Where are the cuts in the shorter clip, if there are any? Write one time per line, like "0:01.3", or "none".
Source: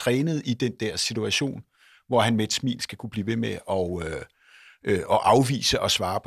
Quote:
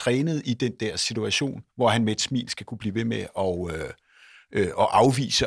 0:01.7